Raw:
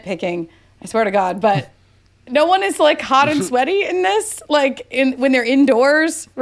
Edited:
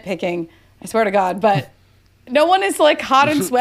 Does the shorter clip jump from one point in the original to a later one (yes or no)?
no